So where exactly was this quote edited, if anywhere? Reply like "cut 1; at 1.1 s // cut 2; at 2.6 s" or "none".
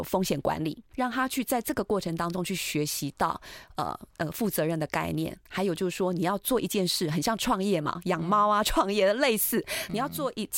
cut 1; at 0.9 s